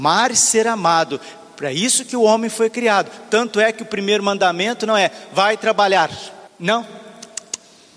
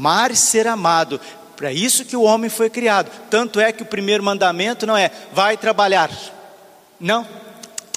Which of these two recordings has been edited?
first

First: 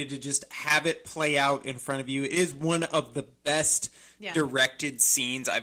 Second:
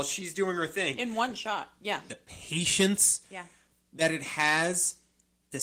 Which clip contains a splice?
second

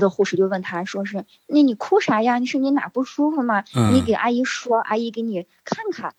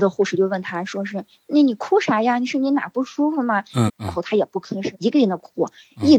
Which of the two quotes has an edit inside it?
second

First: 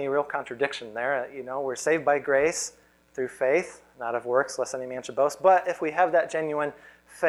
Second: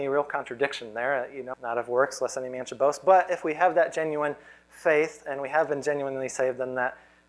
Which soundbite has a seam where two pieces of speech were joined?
second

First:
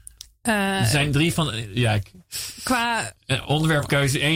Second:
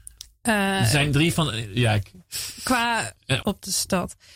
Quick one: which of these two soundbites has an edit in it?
second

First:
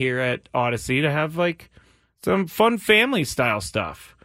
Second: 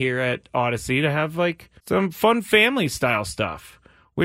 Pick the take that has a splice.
second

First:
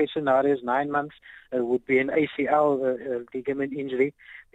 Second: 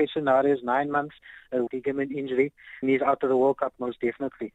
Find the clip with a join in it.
second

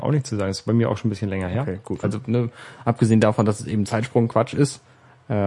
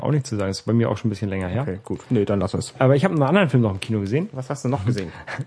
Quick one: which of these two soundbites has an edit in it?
first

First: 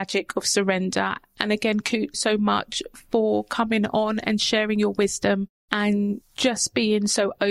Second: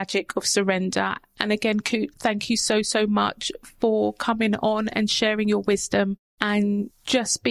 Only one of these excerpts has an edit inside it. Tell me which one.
first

